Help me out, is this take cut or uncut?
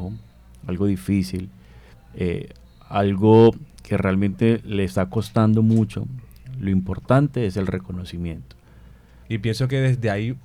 cut